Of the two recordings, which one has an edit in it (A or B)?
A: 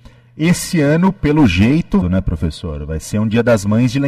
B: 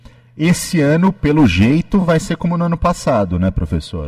A